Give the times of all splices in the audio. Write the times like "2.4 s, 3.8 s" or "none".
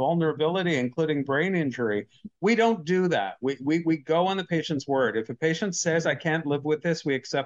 2.3 s